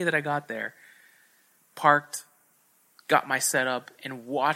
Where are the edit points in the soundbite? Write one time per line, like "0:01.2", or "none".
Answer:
0:01.6